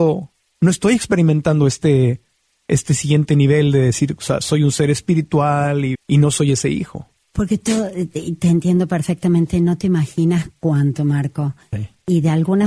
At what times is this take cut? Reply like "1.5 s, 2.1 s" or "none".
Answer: 5.9 s